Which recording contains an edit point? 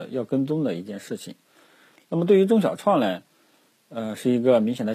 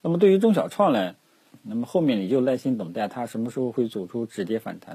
second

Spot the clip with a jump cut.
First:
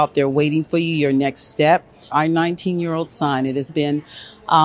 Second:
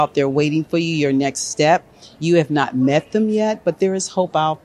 first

